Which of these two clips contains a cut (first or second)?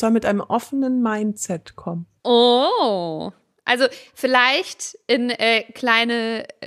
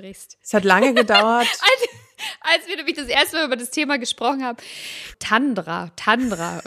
second